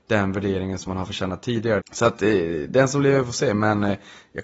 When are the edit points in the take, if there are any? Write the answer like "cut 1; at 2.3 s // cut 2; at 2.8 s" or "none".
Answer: cut 1; at 1.8 s